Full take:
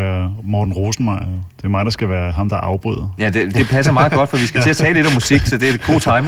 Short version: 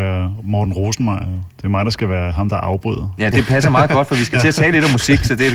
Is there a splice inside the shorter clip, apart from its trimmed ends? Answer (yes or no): yes